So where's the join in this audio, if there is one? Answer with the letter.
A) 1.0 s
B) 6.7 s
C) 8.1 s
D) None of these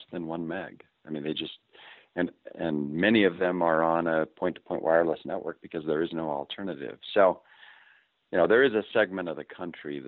D